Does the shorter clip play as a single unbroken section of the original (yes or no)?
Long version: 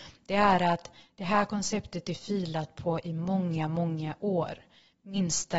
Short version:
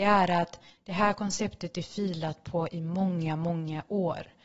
yes